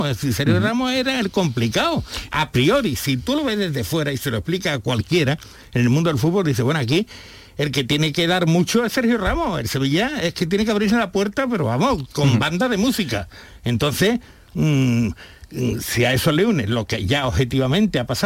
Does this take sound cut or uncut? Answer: uncut